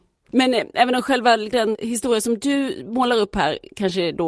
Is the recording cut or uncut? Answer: cut